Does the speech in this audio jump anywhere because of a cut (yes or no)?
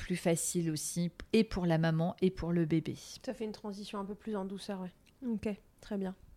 yes